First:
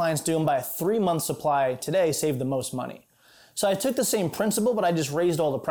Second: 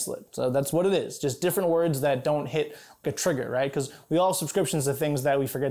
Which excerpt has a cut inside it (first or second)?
second